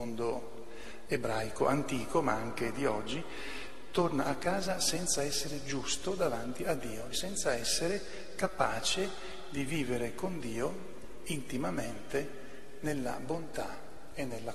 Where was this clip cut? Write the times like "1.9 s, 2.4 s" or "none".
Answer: 7.1 s